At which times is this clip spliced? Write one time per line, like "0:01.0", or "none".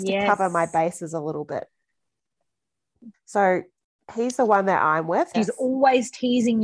0:03.1
0:05.3